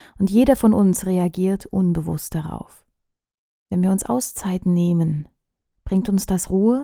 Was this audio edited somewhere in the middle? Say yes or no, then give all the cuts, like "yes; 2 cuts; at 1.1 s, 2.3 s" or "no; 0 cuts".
no; 0 cuts